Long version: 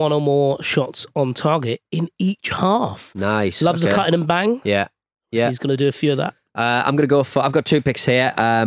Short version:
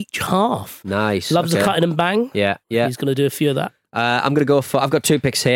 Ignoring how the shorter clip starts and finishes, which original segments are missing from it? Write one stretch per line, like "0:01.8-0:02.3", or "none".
0:04.9-0:05.2